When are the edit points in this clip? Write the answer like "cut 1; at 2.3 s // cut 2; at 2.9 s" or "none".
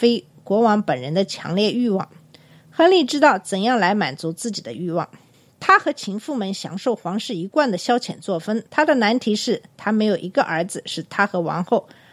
cut 1; at 8.7 s